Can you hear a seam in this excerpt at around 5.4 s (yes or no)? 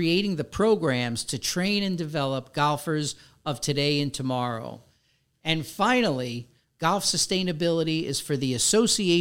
no